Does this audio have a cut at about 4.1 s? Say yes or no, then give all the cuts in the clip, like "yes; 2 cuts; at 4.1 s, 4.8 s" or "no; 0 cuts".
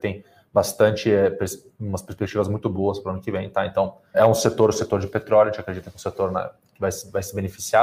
yes; 1 cut; at 4.1 s